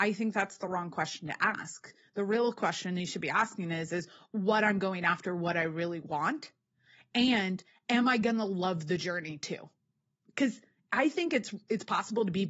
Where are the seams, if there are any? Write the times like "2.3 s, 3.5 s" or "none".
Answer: none